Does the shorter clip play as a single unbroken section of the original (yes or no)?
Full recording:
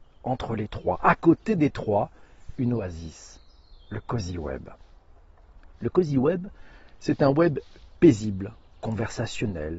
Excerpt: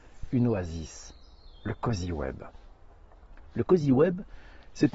yes